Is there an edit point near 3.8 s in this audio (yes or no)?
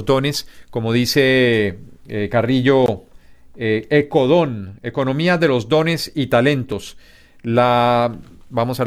no